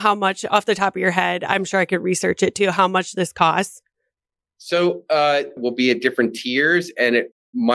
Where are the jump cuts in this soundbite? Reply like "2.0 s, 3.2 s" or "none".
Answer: 5.6 s